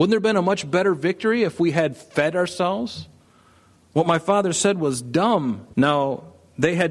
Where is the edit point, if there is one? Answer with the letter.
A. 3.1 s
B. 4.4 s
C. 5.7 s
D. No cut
C